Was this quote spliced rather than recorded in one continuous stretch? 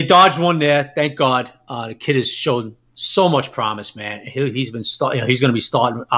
no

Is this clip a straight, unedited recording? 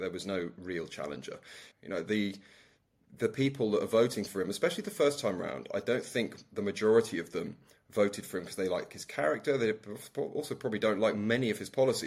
no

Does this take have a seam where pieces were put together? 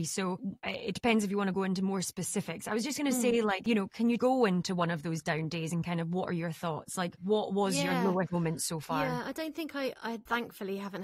no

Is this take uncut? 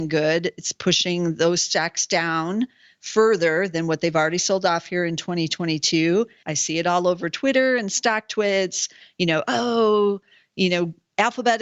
no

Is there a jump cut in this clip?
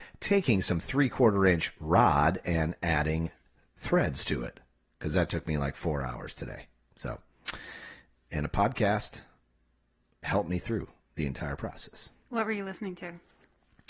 no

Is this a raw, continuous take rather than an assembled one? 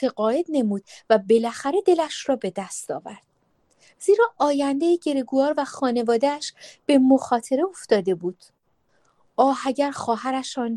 yes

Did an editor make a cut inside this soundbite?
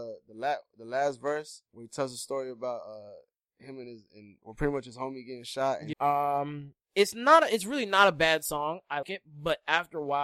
yes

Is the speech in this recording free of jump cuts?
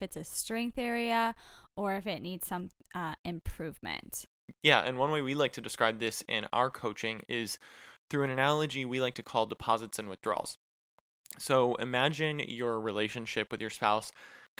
yes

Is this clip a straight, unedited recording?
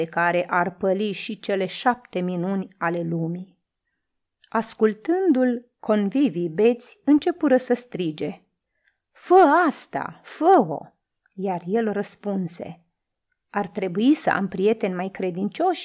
yes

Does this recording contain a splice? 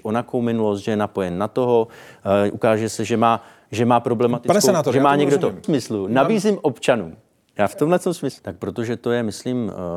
yes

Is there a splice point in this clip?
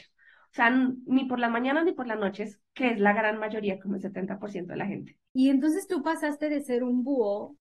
yes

